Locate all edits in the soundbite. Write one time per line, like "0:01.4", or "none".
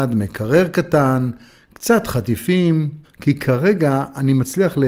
0:03.0